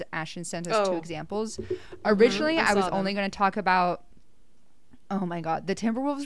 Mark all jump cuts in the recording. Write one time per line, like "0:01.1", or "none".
none